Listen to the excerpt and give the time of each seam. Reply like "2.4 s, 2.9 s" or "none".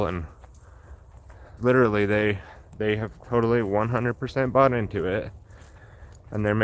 1.6 s